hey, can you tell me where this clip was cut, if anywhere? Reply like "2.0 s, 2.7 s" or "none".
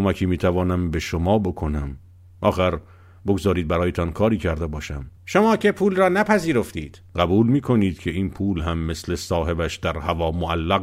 5.2 s, 7.1 s